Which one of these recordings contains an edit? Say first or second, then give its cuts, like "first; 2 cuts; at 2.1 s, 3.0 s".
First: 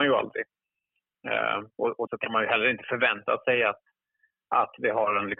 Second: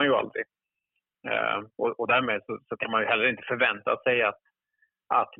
first; 1 cut; at 2.1 s